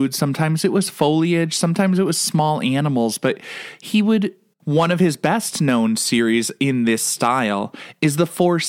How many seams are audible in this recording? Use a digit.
1